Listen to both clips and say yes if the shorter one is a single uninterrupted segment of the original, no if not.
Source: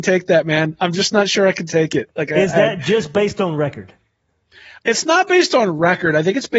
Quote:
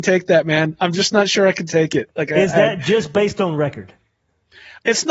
yes